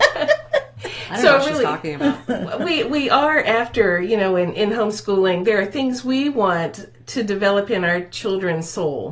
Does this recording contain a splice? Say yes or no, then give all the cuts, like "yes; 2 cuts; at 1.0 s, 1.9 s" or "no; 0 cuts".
no; 0 cuts